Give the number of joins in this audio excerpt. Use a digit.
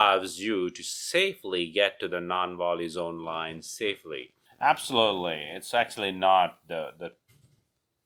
1